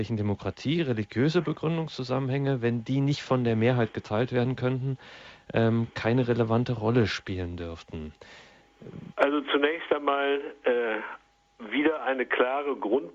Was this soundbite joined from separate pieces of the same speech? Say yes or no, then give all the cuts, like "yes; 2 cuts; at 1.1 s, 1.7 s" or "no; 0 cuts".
yes; 1 cut; at 9.1 s